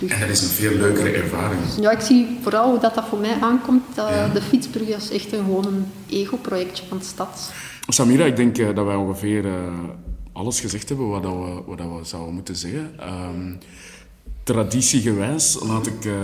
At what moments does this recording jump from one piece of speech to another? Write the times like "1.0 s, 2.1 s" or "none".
none